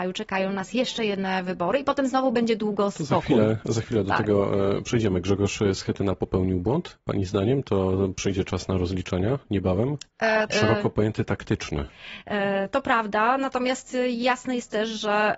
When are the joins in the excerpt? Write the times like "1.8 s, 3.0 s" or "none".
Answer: 10.5 s, 12.7 s

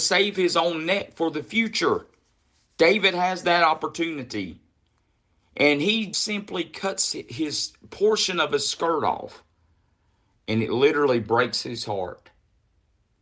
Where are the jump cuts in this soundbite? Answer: 6.1 s

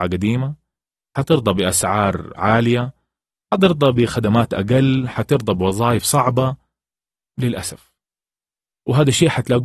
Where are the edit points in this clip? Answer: none

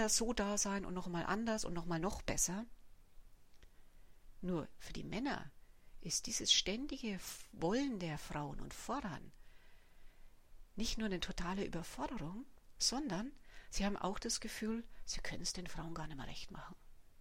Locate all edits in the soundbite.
none

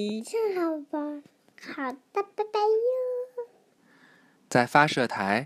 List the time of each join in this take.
1.5 s

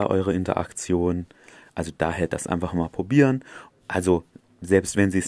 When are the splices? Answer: 3.7 s

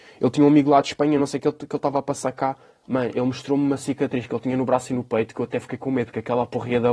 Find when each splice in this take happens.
none

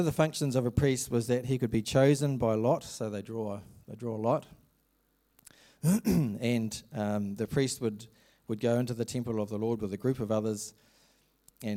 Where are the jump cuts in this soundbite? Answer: none

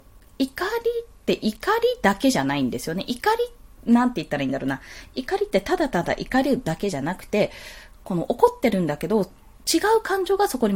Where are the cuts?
5.1 s

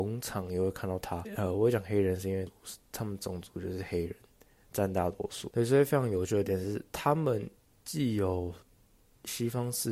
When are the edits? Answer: none

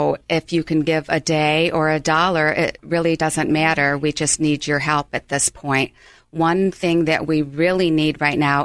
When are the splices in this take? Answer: none

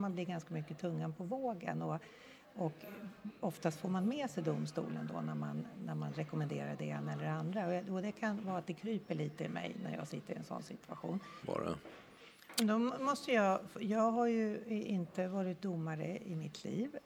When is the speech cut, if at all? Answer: 11.4 s

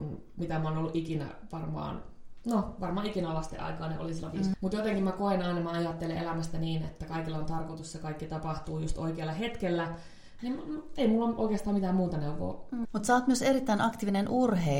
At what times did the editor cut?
4.5 s, 10.4 s, 12.8 s

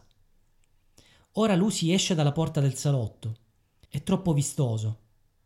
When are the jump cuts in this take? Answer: 3.9 s

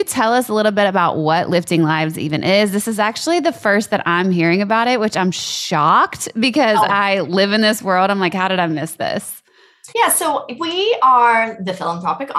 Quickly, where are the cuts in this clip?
9.9 s

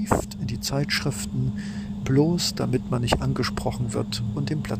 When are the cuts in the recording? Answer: 2.0 s

